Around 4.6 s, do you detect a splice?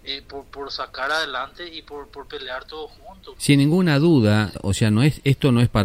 yes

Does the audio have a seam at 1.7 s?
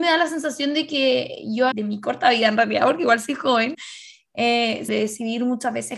yes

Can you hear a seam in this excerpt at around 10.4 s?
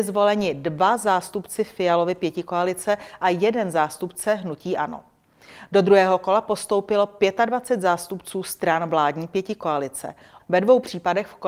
yes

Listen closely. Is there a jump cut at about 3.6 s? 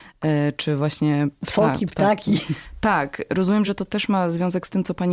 no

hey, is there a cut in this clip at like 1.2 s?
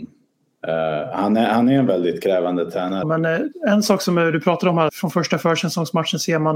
no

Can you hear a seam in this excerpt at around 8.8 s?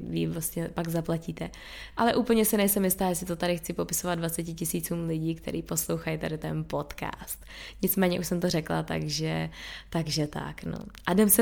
no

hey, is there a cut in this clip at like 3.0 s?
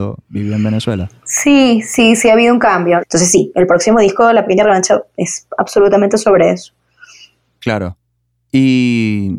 yes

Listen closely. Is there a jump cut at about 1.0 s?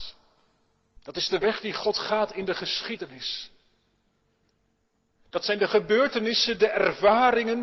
yes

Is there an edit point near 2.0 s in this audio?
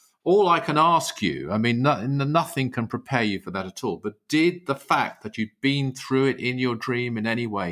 no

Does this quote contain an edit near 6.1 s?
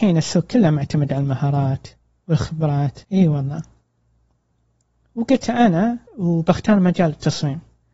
yes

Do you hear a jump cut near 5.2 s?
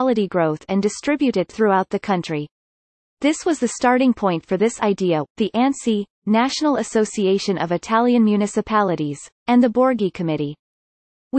yes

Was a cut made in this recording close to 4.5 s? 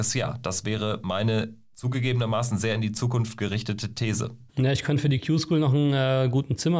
yes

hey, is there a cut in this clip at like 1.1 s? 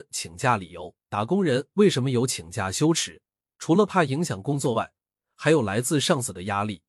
yes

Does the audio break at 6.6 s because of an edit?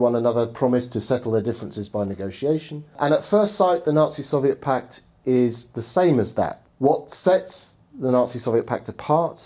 yes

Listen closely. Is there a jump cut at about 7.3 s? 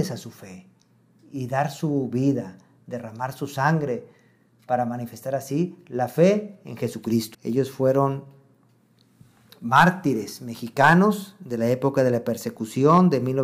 yes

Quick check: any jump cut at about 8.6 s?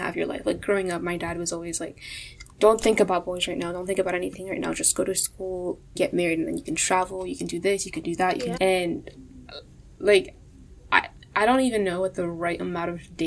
yes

